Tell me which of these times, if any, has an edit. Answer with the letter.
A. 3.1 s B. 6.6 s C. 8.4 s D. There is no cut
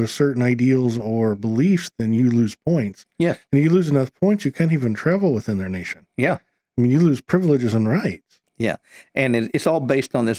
C